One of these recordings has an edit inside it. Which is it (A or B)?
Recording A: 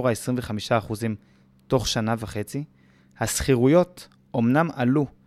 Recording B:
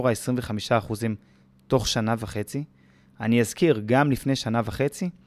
A